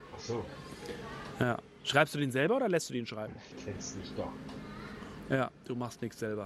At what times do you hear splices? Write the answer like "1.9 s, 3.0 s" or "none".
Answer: 3.5 s